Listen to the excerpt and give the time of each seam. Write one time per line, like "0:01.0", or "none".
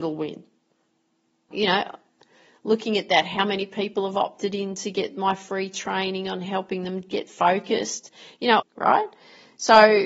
0:01.5
0:08.6